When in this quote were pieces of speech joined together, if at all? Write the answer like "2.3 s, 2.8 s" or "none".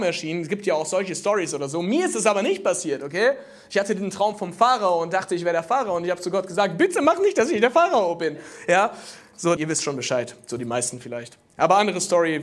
9.6 s